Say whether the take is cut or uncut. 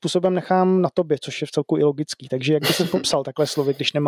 uncut